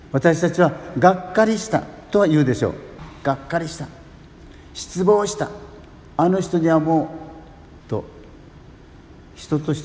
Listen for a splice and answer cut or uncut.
cut